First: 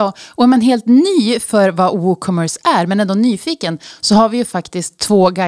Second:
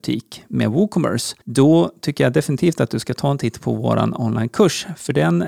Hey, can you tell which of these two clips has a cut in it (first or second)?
second